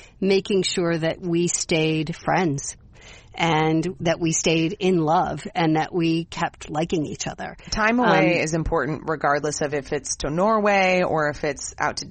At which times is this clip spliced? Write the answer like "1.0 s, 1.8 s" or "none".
none